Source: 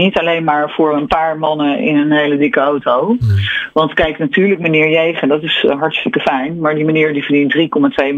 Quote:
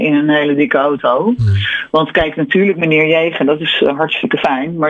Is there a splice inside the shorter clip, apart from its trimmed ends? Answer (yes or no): no